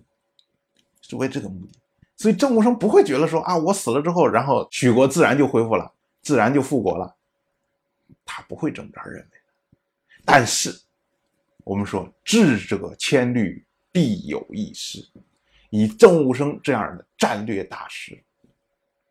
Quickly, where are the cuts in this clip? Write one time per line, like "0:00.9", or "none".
0:02.0

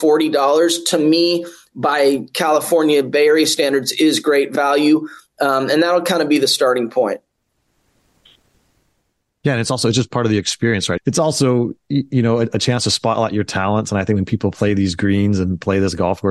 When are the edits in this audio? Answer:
0:11.0

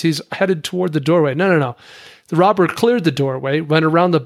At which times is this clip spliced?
none

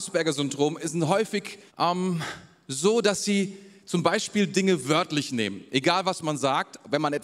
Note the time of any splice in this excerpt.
0:01.7

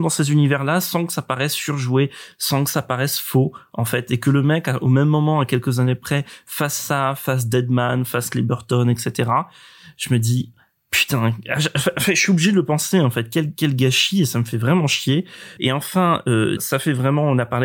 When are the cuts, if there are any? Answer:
0:15.6
0:16.6

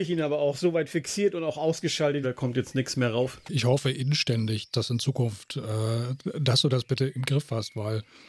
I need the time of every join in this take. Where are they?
0:02.2

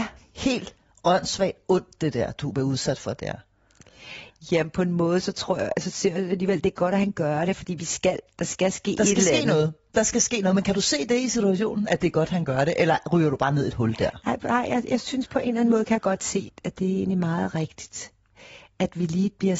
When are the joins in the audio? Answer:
0:16.5

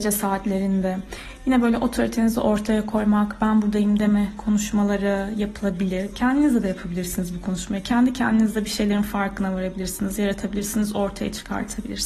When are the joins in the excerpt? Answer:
none

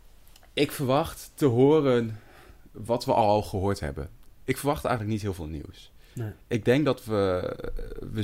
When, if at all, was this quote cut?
none

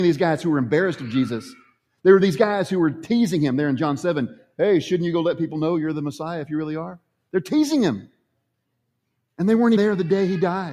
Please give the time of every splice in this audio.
0:09.8

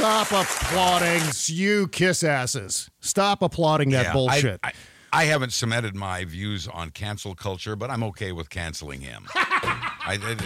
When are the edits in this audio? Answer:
none

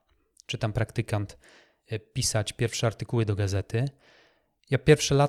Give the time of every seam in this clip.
none

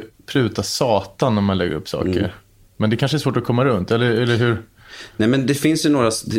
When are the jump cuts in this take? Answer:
none

